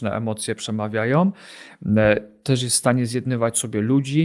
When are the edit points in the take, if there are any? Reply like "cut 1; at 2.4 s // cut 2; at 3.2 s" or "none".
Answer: none